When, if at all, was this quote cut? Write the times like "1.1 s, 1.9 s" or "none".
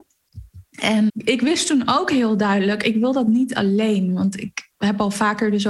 1.1 s